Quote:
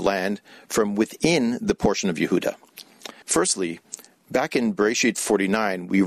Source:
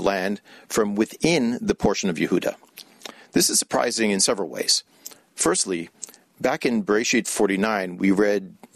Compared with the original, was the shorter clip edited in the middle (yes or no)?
yes